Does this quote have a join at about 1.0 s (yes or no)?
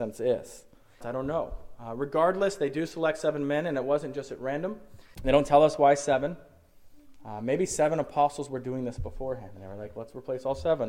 yes